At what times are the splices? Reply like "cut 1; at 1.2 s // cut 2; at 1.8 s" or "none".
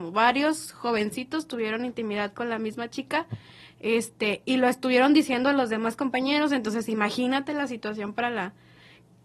none